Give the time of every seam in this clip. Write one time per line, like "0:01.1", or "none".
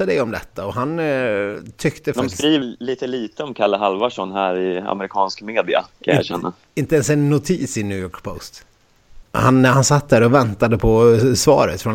0:02.6
0:09.2